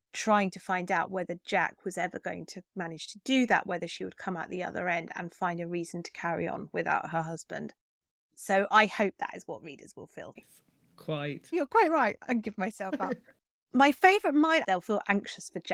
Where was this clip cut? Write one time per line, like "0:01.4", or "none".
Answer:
0:10.4
0:11.5
0:14.6